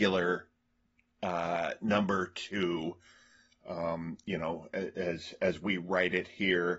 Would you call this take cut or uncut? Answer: uncut